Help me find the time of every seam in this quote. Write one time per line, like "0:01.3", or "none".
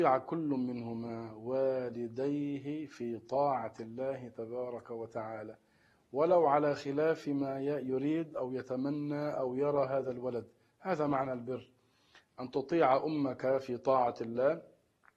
none

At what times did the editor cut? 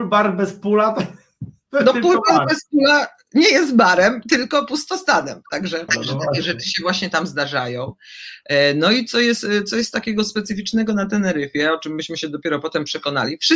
0:05.9

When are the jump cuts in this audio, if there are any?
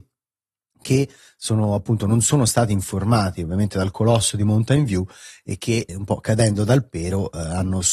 0:05.9

